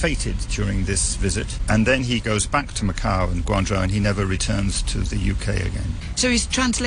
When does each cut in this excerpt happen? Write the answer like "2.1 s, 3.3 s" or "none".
none